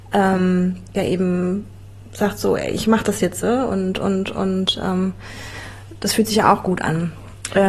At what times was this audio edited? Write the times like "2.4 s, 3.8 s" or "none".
none